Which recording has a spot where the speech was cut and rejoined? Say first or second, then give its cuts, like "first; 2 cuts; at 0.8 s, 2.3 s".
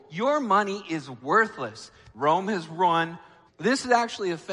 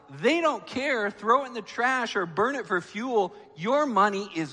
first; 2 cuts; at 2.1 s, 3.5 s